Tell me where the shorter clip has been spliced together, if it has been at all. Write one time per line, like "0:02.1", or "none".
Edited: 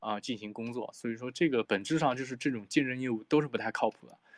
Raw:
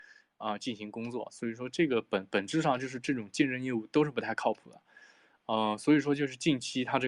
0:01.6